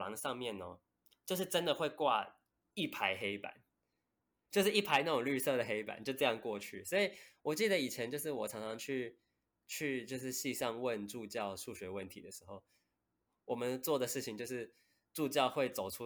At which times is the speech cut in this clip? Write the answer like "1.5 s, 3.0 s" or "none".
none